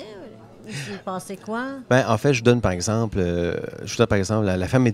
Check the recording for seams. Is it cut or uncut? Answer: uncut